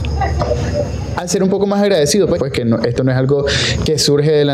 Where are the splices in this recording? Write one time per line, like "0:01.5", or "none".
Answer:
0:02.4

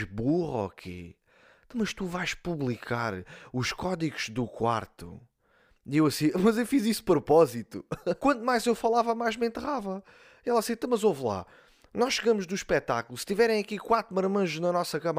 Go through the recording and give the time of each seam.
0:08.2

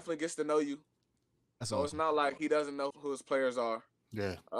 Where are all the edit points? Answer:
0:02.9

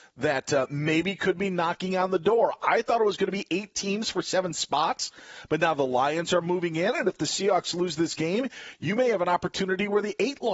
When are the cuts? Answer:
none

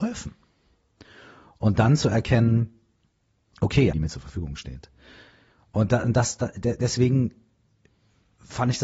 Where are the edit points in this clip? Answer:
0:03.9

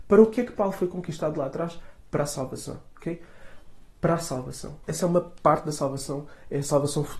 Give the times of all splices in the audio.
0:04.8

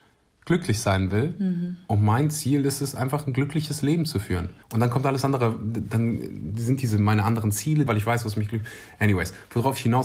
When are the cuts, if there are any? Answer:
0:04.6
0:07.9

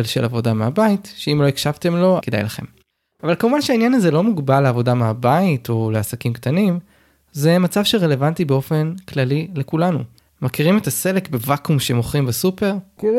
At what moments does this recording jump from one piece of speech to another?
0:02.2
0:10.3

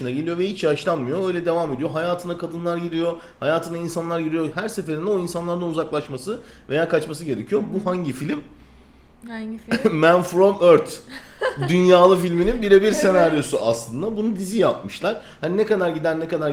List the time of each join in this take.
none

